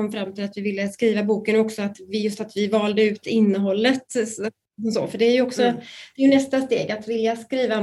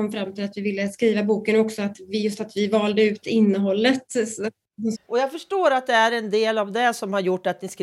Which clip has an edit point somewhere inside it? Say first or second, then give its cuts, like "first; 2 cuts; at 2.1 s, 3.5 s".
second; 1 cut; at 4.9 s